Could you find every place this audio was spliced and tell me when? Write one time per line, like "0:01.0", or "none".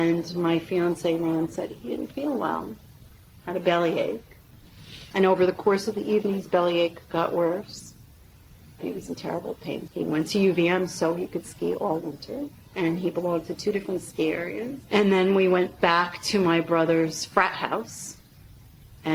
0:08.8
0:09.9
0:14.8

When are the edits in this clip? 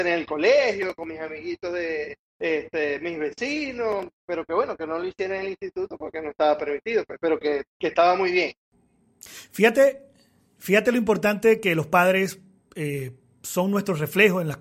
none

